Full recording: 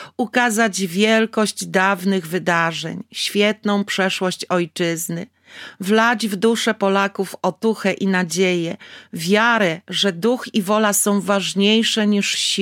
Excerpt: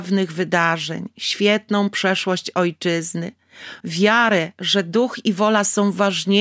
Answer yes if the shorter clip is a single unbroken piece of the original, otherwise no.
no